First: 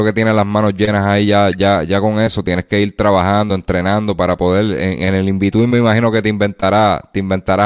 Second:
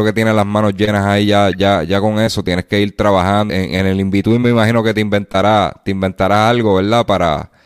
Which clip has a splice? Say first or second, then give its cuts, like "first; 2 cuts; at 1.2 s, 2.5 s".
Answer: second; 1 cut; at 3.5 s